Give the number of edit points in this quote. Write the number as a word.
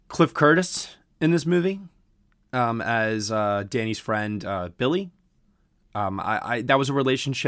zero